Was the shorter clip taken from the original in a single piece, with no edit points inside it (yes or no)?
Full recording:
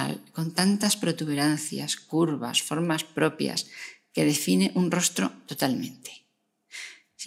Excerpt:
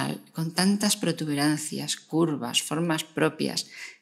yes